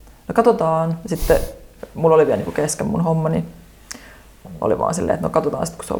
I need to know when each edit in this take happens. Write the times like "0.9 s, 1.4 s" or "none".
none